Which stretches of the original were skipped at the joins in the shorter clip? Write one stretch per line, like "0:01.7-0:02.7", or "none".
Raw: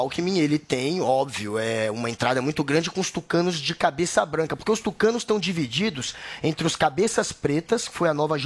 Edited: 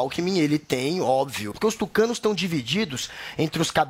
0:01.5-0:04.6